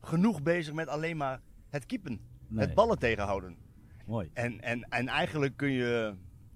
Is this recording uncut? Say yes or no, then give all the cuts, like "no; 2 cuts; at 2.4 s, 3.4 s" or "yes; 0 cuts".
no; 1 cut; at 4.0 s